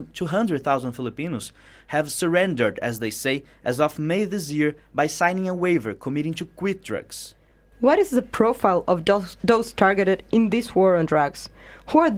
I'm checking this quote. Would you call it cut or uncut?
uncut